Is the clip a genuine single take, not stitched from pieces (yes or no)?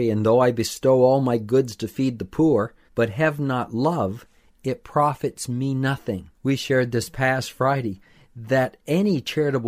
no